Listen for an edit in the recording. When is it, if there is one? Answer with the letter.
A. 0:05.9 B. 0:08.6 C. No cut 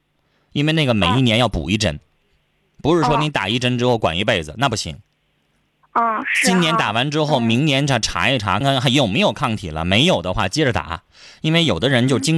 B